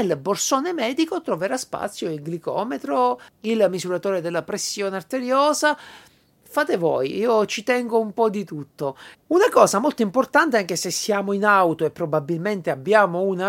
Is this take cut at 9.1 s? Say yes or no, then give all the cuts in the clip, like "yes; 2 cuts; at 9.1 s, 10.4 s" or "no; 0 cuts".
yes; 1 cut; at 9.1 s